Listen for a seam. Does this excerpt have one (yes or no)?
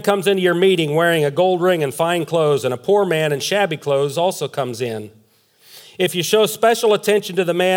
no